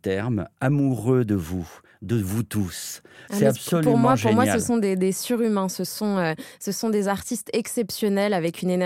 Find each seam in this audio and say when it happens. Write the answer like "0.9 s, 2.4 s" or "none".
3.3 s